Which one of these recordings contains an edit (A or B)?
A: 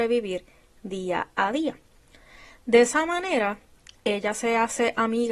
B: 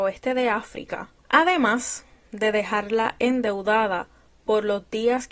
B